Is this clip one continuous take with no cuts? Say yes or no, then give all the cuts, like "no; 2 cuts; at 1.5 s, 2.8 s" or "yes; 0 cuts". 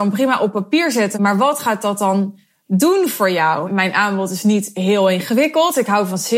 no; 2 cuts; at 1.1 s, 3.6 s